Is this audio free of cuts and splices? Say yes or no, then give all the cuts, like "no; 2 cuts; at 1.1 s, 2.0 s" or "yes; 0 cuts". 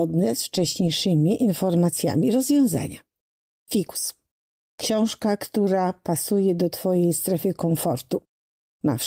yes; 0 cuts